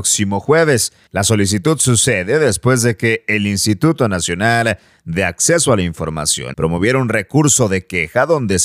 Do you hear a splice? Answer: yes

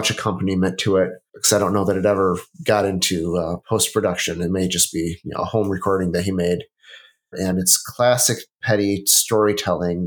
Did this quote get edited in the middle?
yes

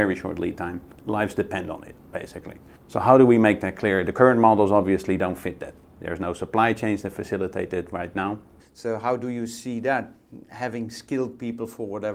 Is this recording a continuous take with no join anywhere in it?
no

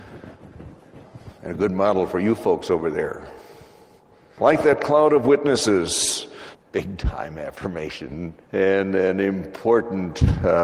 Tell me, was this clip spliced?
yes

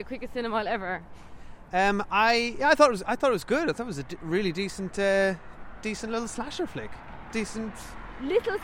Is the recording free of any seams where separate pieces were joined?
yes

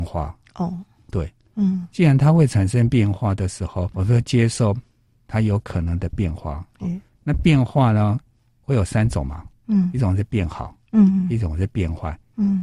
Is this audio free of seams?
no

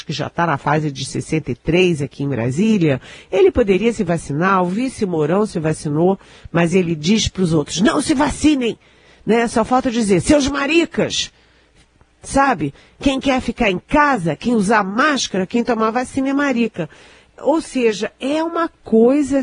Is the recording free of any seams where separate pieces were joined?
yes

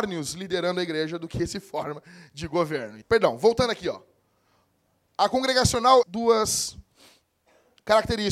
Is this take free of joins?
no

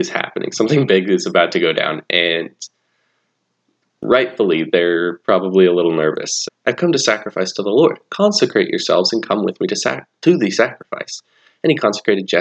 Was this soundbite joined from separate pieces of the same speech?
yes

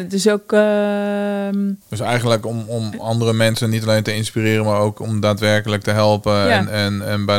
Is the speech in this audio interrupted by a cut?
yes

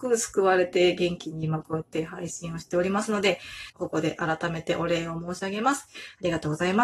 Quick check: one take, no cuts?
no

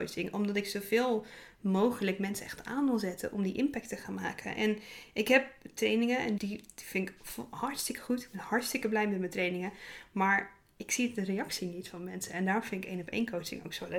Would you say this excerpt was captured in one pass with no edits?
no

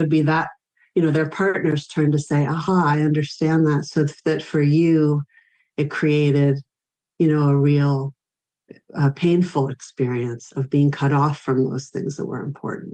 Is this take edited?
no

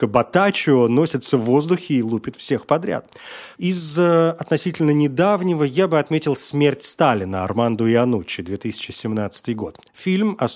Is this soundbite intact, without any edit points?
no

